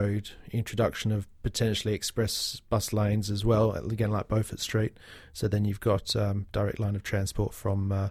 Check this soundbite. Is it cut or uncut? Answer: uncut